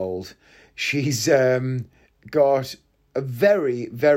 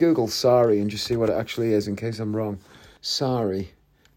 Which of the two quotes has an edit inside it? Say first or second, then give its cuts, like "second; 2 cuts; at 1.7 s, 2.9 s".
second; 1 cut; at 3.0 s